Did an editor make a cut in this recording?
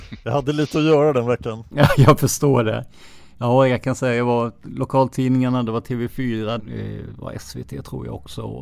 yes; 1 cut; at 6.6 s

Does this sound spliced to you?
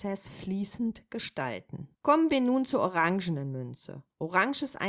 yes; 1 cut; at 1.9 s

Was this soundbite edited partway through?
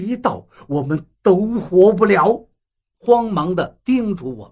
yes; 1 cut; at 2.9 s

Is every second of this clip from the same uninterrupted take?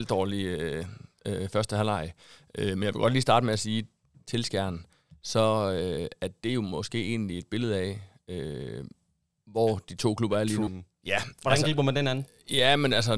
no; 2 cuts; at 4.1 s, 10.7 s

